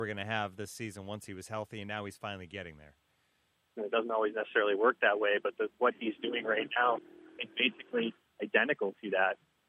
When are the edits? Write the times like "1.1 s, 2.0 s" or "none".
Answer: 3.8 s